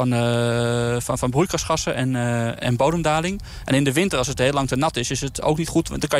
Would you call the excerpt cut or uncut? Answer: cut